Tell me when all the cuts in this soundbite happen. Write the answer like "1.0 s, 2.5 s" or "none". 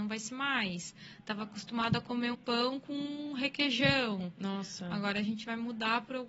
2.3 s